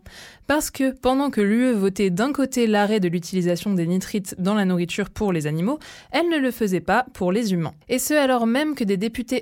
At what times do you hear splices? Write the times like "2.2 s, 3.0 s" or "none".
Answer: 7.8 s